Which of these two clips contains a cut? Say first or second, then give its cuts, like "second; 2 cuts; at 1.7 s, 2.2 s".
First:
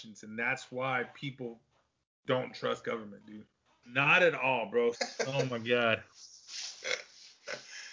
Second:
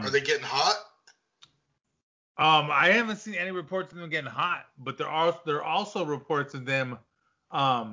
first; 2 cuts; at 3.8 s, 4.9 s